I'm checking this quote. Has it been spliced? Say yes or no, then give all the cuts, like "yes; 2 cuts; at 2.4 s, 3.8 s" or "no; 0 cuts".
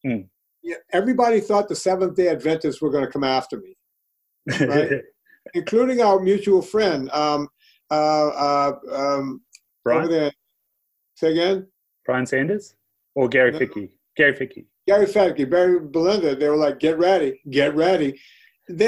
no; 0 cuts